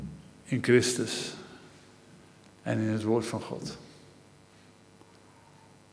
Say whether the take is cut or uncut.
uncut